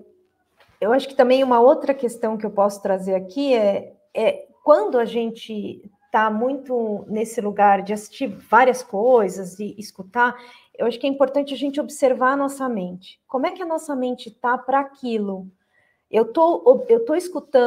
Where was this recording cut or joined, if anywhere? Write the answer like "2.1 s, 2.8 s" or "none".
none